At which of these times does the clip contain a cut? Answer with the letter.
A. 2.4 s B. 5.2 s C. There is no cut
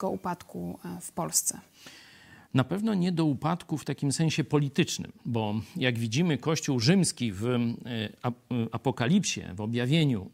B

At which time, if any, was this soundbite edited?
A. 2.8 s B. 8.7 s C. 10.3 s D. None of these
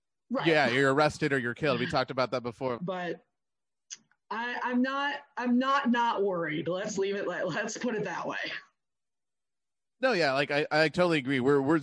A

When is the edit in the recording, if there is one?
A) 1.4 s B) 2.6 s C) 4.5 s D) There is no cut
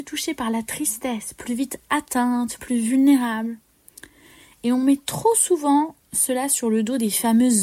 B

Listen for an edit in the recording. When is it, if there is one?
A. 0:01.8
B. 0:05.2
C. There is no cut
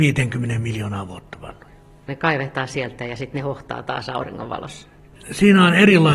B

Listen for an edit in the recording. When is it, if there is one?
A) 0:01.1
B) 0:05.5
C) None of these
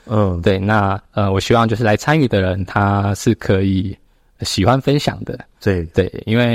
A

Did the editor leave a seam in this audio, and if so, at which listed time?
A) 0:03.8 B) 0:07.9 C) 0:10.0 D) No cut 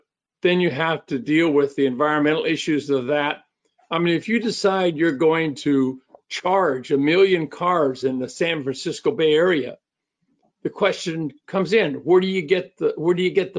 A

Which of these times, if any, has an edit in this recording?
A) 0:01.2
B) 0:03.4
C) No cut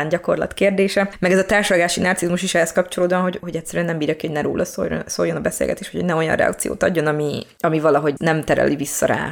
B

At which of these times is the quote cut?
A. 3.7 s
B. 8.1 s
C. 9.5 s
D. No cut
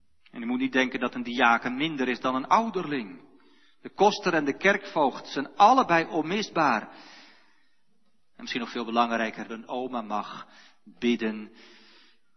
C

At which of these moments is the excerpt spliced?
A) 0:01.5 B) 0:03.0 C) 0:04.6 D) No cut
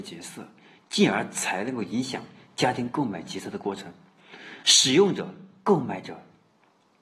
C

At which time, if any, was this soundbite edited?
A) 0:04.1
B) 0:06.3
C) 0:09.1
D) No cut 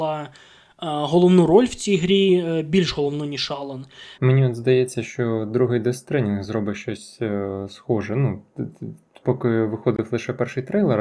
A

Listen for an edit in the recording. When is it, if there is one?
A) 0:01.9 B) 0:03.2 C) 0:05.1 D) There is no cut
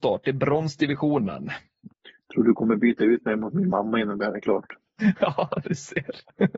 A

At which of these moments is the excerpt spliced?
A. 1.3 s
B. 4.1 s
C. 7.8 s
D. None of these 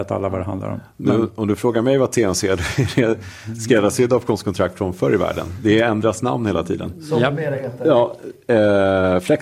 D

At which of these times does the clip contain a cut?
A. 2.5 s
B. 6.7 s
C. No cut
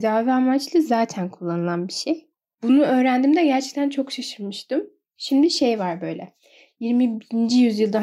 A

